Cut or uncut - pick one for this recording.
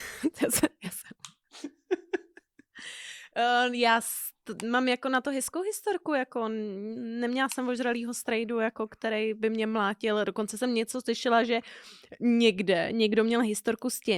uncut